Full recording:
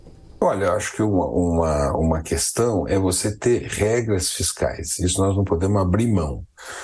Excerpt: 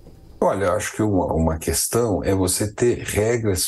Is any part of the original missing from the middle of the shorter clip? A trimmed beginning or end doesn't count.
yes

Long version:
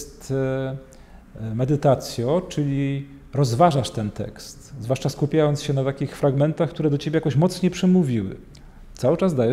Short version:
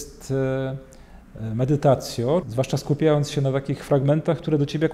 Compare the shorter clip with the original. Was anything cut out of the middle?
yes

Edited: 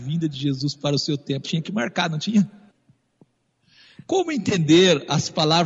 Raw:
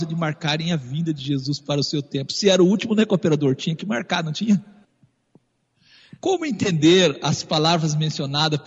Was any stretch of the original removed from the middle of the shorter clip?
yes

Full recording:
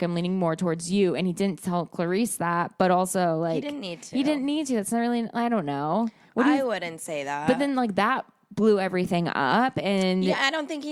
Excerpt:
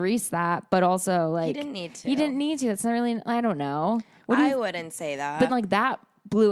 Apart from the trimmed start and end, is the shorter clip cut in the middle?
yes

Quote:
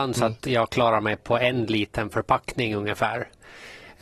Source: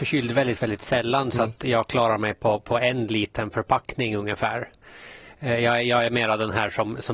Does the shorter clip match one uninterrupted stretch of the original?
no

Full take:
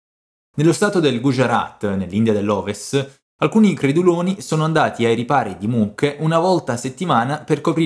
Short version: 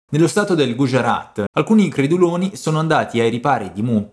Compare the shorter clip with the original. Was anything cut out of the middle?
yes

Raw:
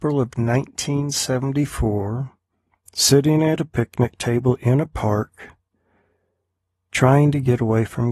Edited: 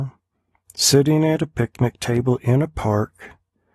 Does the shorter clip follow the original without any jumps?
yes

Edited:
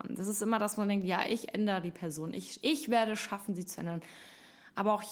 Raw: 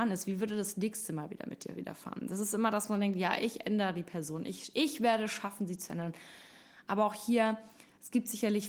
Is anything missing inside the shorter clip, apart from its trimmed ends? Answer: no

